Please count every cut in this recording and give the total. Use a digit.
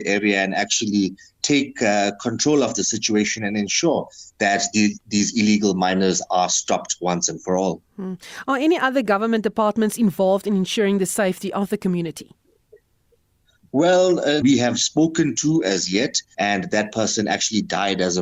2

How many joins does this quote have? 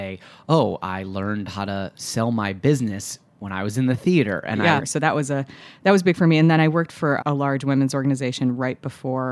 2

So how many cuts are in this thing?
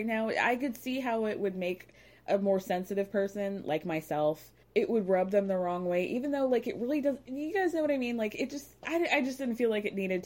1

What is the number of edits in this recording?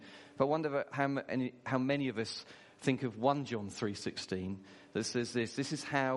0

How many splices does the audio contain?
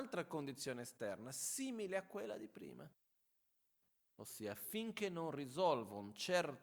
0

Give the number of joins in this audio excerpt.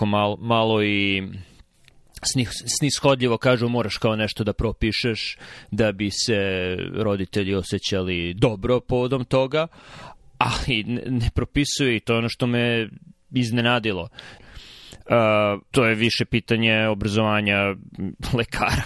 2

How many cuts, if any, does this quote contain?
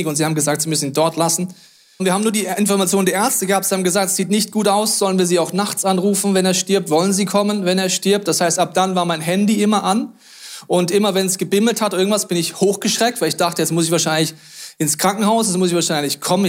1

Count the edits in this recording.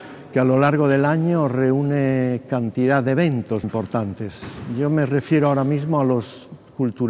1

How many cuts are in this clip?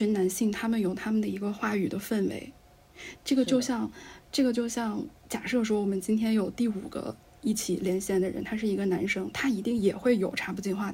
0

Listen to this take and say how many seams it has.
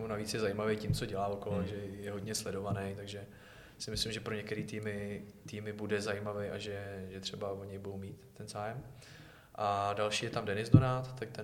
0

